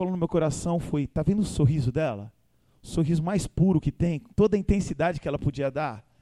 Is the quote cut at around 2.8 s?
no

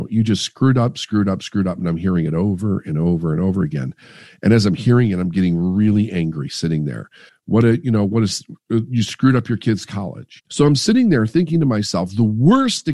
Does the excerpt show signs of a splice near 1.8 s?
no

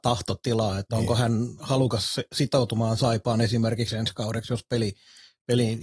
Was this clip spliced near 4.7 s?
no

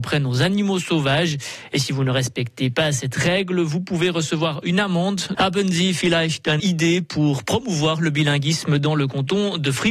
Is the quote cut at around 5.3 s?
yes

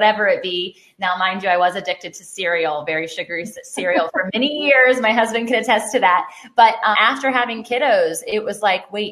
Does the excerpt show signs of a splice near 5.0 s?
no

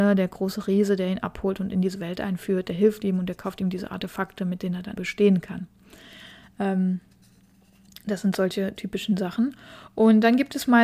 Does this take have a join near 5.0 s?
yes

